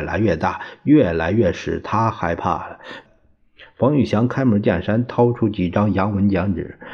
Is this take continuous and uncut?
no; 1 cut; at 3.0 s

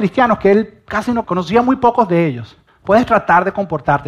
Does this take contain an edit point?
yes; 2 cuts; at 1.2 s, 2.7 s

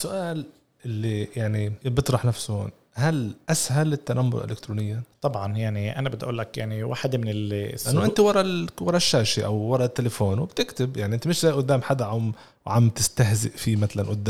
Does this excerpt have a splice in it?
no; 0 cuts

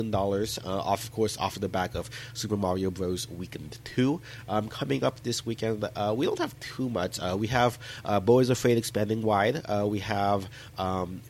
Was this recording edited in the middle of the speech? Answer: no; 0 cuts

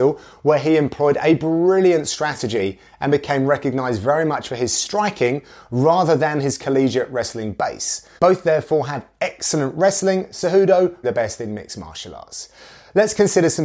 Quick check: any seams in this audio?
yes; 2 cuts; at 8.2 s, 11.0 s

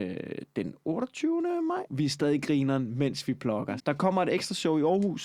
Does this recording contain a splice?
yes; 2 cuts; at 1.9 s, 3.8 s

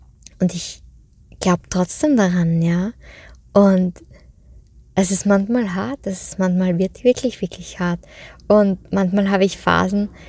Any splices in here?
no; 0 cuts

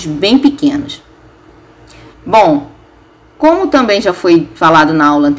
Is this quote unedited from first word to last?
no; 1 cut; at 2.1 s

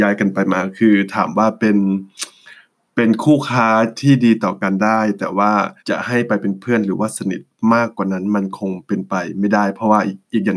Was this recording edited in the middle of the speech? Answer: yes; 1 cut; at 5.8 s

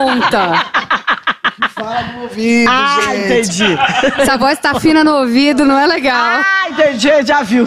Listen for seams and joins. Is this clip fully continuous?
yes; 0 cuts

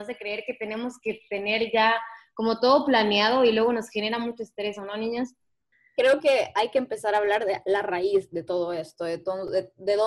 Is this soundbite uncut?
yes; 0 cuts

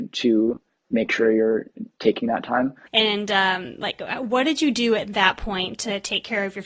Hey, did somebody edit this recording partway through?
yes; 1 cut; at 2.9 s

